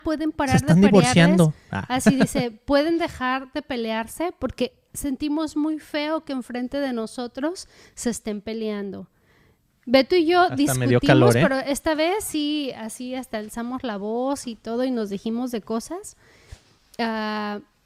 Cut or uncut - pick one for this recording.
uncut